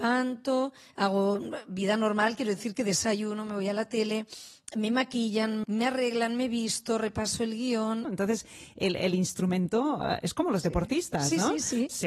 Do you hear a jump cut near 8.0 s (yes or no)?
yes